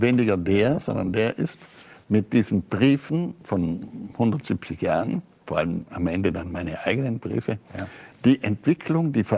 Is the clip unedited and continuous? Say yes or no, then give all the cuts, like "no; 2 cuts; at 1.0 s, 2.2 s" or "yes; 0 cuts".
no; 1 cut; at 2.0 s